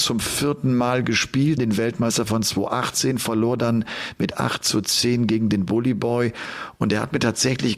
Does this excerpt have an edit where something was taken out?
yes; 1 cut; at 1.6 s

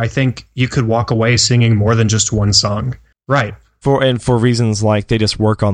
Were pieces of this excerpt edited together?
yes; 1 cut; at 3.1 s

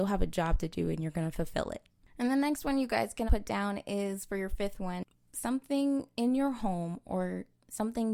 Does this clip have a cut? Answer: yes; 1 cut; at 3.3 s

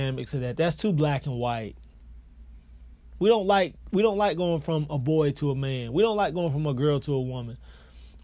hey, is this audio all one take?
yes; 0 cuts

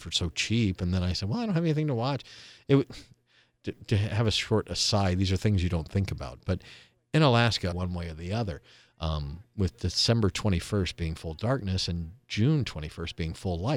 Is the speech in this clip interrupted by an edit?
yes; 1 cut; at 7.7 s

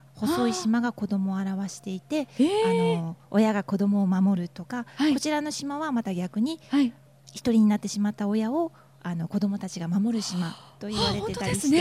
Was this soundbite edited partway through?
no; 0 cuts

